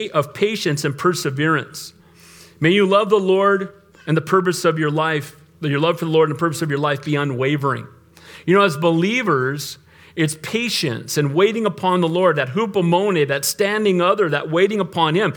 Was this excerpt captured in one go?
yes; 0 cuts

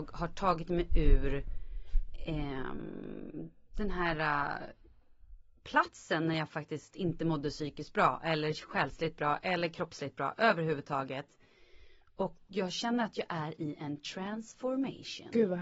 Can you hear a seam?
no; 0 cuts

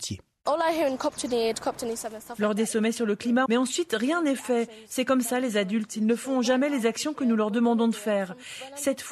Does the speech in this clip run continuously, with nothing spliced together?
no; 1 cut; at 3.5 s

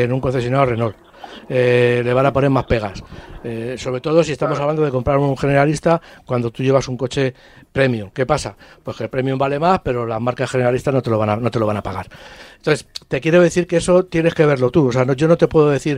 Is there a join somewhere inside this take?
no; 0 cuts

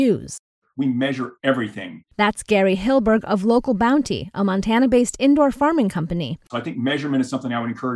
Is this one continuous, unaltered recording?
no; 1 cut; at 6.5 s

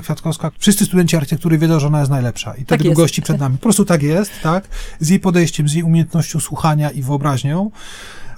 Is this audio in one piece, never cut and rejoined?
yes; 0 cuts

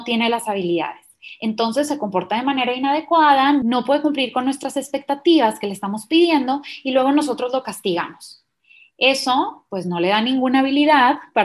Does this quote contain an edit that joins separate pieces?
no; 0 cuts

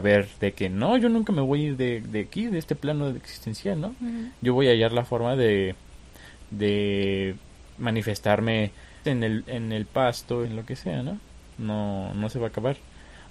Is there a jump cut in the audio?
yes; 2 cuts; at 9.0 s, 10.4 s

